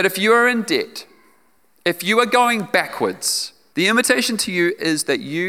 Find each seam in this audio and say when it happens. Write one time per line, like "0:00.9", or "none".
0:03.7